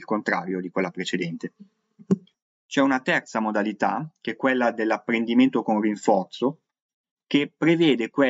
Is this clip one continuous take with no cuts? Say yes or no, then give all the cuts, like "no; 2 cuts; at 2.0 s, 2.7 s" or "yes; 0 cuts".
yes; 0 cuts